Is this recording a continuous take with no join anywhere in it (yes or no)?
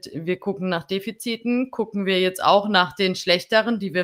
yes